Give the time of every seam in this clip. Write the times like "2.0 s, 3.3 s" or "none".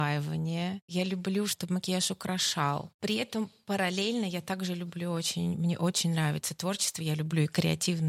none